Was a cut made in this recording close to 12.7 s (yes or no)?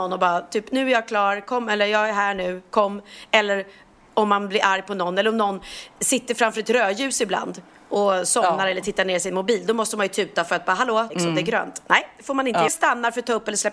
yes